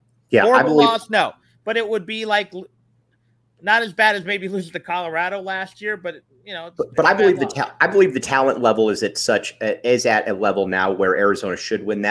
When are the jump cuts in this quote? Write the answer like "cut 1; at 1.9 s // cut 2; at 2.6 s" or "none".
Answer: none